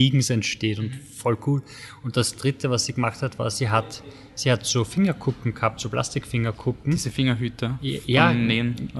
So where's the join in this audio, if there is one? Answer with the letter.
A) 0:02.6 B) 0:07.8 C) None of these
C